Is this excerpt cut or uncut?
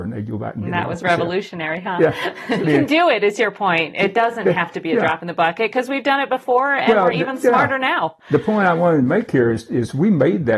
cut